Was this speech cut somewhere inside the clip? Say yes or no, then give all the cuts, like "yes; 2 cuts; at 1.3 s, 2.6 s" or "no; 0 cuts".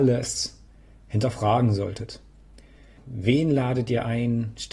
yes; 1 cut; at 3.0 s